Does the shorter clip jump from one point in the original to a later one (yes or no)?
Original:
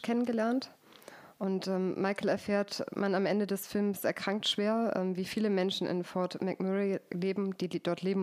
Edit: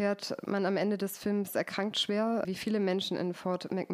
yes